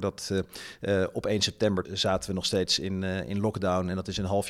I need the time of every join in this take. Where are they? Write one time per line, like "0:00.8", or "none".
0:01.8